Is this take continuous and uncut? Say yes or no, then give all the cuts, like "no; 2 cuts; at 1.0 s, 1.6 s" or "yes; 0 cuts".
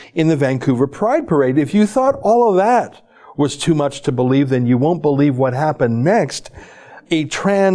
yes; 0 cuts